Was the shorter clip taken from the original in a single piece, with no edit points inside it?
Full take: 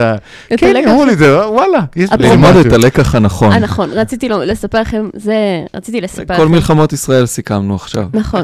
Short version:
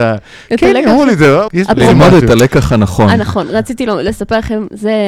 no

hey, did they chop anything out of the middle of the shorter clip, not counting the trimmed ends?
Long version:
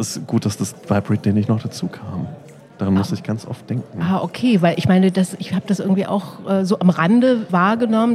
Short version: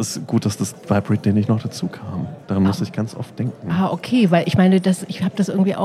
yes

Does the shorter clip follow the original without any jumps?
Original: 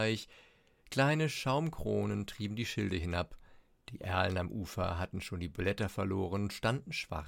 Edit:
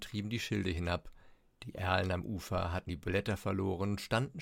no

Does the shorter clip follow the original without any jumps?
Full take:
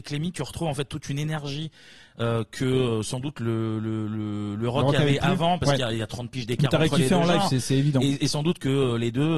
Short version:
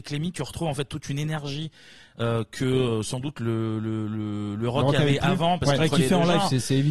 no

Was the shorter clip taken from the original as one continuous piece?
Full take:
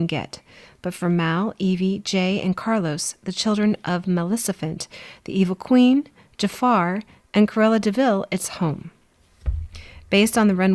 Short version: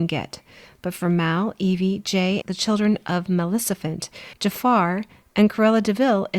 no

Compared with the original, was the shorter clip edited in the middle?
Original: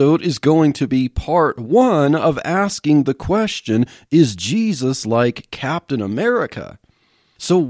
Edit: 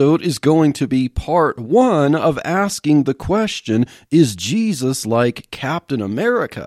no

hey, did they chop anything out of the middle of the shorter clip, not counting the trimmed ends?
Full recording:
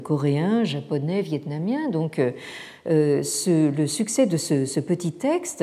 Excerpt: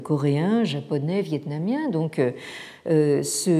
no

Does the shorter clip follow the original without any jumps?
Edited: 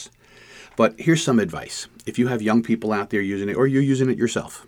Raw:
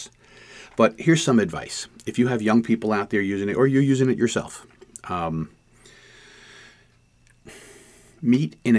yes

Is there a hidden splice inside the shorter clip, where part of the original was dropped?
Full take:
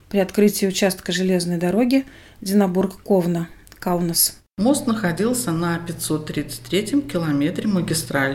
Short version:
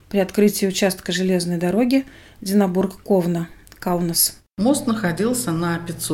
no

